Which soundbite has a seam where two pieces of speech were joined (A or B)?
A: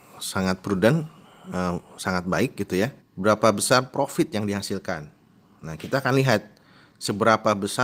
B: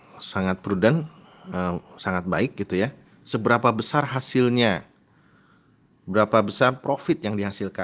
A